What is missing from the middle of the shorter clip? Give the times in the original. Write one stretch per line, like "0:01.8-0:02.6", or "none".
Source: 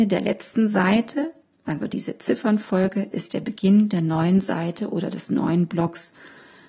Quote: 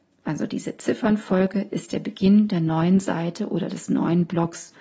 none